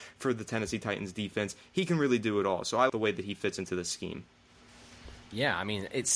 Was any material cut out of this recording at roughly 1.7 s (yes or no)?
no